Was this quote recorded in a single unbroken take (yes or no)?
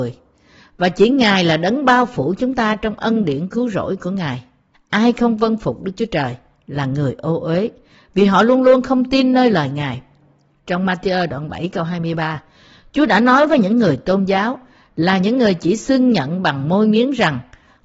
no